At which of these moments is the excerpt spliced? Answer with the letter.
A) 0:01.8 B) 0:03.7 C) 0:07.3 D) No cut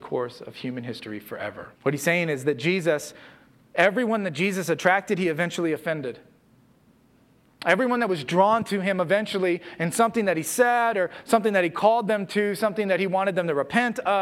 A